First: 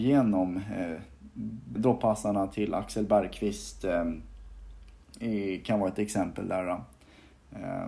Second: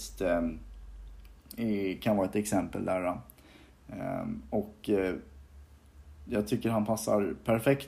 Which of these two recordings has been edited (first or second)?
first